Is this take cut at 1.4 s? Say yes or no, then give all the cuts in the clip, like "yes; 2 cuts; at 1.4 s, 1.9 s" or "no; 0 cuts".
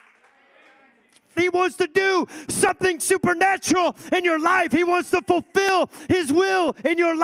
yes; 1 cut; at 1.4 s